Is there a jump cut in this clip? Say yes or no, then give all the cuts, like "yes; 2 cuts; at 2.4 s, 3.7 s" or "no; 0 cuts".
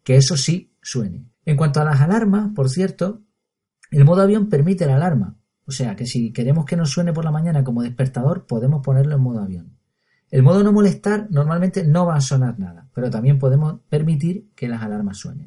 yes; 1 cut; at 1.3 s